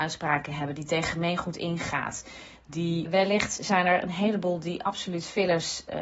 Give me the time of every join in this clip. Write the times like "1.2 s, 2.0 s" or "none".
3.1 s